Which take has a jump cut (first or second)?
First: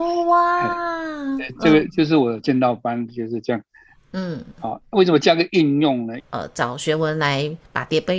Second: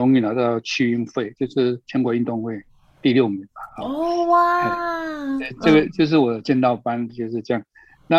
first